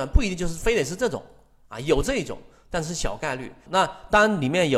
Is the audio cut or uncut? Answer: cut